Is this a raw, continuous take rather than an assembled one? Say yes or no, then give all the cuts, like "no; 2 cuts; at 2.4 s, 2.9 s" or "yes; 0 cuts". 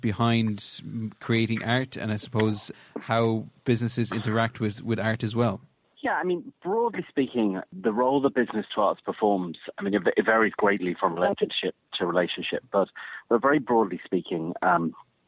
yes; 0 cuts